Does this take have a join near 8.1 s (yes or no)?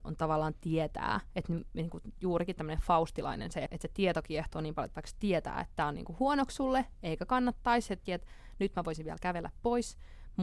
yes